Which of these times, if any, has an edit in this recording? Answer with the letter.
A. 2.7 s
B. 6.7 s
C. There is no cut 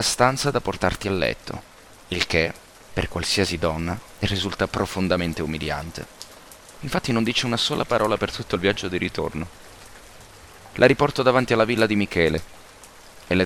C